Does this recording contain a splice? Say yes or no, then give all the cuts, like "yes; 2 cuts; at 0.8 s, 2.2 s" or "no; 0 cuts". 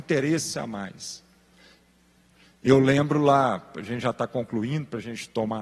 no; 0 cuts